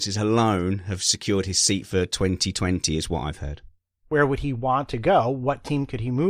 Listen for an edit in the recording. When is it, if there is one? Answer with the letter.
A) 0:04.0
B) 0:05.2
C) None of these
A